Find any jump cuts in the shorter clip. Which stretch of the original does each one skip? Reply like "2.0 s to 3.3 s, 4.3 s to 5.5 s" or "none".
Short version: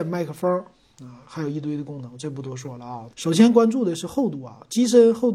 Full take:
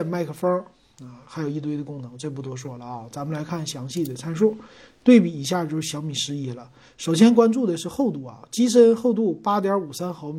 3.1 s to 6.9 s